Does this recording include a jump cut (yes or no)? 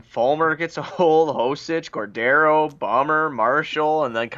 no